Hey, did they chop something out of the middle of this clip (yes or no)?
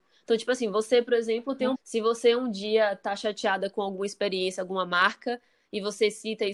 yes